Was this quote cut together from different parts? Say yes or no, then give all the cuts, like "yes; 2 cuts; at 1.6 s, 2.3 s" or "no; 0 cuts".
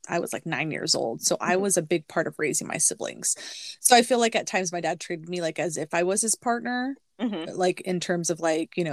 no; 0 cuts